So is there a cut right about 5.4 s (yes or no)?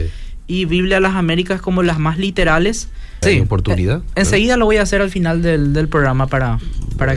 no